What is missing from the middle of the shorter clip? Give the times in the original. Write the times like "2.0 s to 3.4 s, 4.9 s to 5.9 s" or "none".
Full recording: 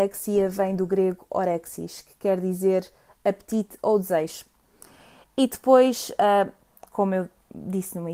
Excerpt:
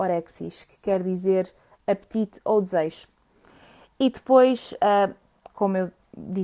none